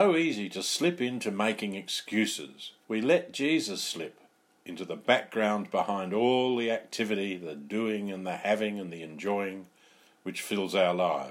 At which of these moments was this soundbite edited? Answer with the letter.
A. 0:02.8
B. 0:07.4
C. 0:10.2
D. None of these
A